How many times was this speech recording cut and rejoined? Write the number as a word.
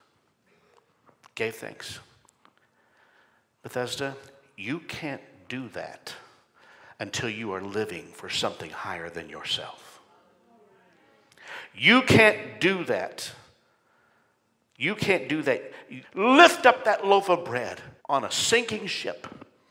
two